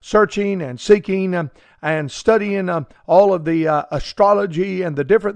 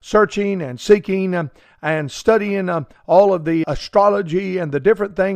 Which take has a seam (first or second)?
second